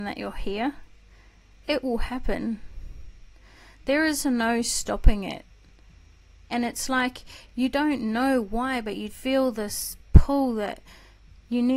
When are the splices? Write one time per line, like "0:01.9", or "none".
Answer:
0:06.5
0:09.1